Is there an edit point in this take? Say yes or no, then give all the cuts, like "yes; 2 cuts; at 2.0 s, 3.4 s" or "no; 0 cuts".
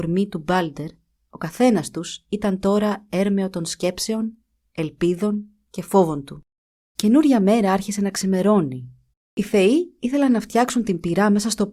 yes; 2 cuts; at 6.9 s, 9.1 s